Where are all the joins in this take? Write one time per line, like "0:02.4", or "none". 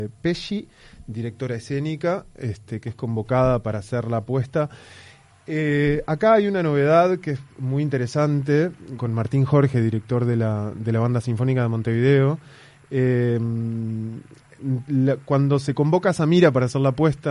0:09.0